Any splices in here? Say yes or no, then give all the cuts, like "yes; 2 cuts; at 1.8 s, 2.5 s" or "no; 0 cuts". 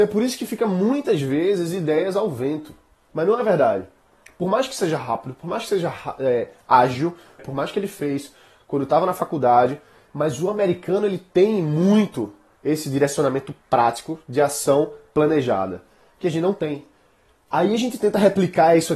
yes; 2 cuts; at 3.1 s, 7.4 s